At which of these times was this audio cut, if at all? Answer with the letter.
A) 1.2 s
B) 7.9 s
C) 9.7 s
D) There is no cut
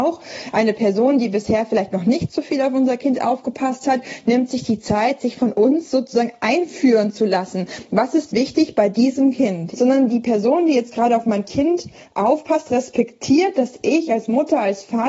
C